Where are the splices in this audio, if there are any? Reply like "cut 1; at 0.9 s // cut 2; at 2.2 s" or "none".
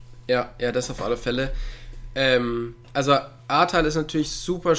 cut 1; at 2.8 s